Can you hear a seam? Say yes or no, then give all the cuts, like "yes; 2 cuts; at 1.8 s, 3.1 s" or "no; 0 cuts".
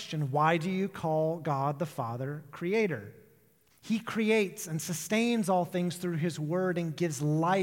yes; 1 cut; at 3.7 s